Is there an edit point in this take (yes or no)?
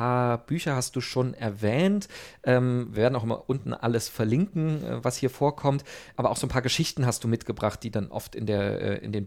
no